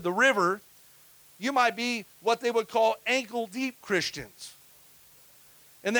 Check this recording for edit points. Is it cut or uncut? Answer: uncut